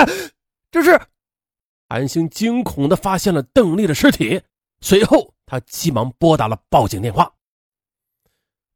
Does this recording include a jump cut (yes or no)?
no